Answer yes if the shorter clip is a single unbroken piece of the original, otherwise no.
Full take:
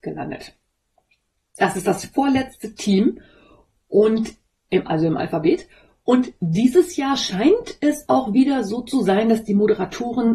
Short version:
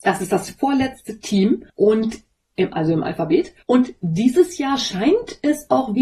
no